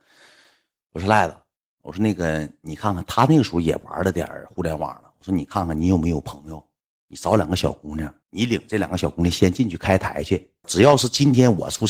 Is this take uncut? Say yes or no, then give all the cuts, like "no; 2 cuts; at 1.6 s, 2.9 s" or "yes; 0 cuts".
no; 2 cuts; at 8.2 s, 10.6 s